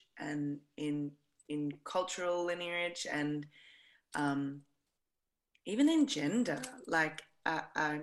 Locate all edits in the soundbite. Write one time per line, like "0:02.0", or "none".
none